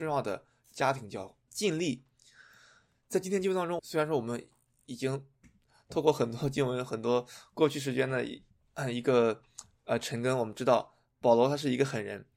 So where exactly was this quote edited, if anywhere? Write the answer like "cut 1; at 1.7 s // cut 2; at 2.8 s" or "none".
cut 1; at 1.5 s // cut 2; at 3.8 s